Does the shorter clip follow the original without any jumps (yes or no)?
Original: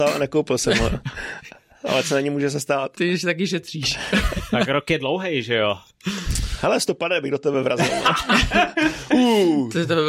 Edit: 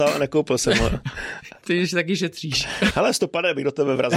no